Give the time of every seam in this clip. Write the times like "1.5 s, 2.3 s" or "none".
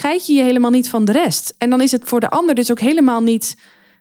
none